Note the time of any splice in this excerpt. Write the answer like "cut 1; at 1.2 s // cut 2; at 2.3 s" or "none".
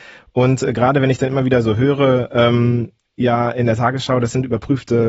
none